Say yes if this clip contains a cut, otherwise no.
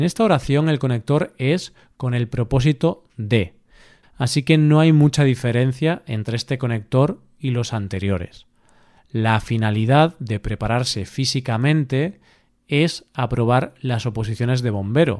yes